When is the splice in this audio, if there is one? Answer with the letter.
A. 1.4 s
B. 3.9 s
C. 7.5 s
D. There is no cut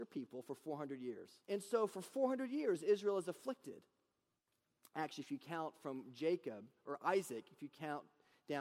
A